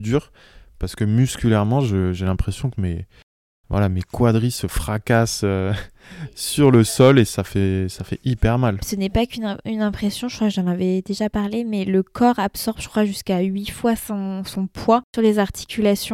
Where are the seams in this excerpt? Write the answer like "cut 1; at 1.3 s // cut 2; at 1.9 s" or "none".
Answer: none